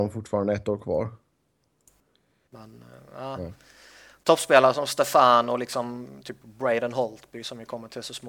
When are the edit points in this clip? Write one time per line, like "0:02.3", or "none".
0:02.5